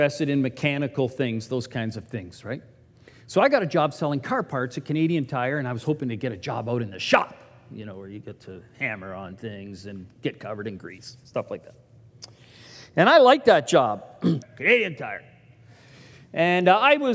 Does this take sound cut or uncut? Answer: cut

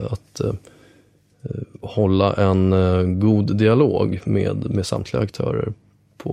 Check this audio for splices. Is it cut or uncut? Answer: uncut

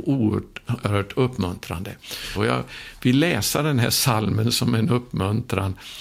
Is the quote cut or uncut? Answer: cut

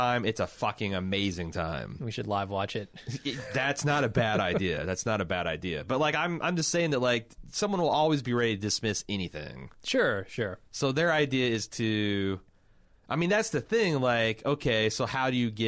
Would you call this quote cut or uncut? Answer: uncut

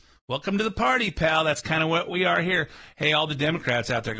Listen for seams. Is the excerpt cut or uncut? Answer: uncut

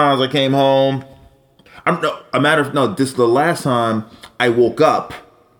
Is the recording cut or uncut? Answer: uncut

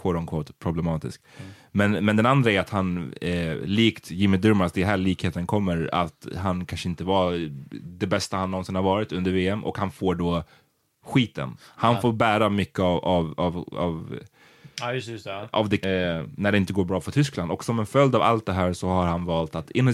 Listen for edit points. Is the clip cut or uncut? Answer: cut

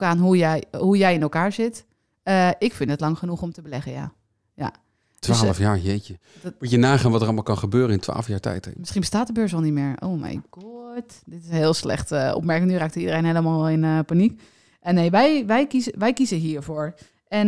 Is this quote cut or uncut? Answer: uncut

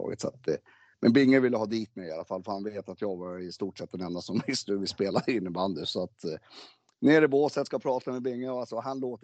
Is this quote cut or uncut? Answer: uncut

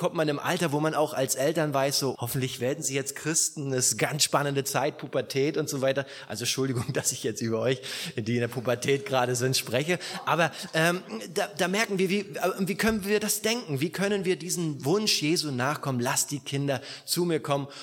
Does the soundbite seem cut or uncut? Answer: cut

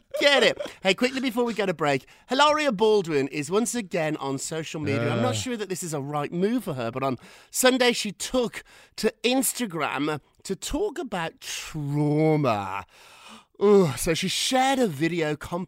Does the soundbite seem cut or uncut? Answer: uncut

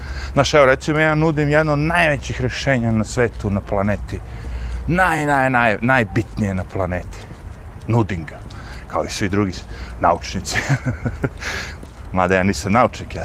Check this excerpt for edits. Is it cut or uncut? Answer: uncut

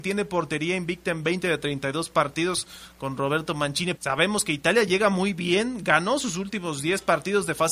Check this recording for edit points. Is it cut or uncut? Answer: cut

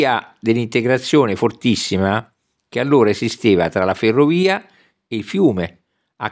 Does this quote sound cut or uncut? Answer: uncut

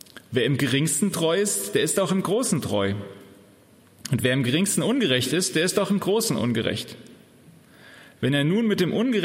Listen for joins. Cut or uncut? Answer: uncut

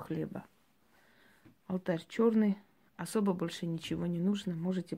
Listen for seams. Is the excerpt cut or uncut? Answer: uncut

